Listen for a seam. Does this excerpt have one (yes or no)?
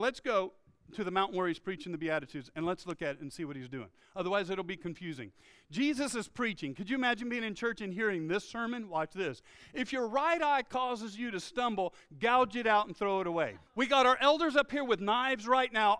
yes